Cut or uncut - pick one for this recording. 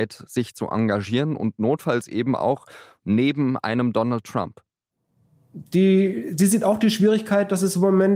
uncut